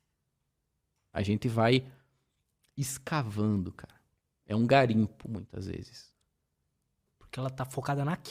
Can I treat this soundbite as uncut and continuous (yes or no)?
no